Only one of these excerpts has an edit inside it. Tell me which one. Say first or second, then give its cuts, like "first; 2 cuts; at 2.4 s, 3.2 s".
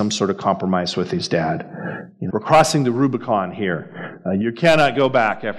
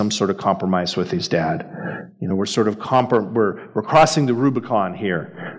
first; 1 cut; at 2.3 s